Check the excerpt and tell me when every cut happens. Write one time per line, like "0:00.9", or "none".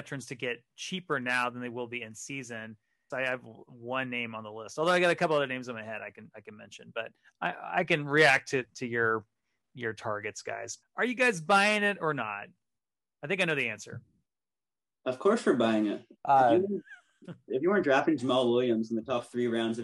0:03.1
0:10.8
0:16.2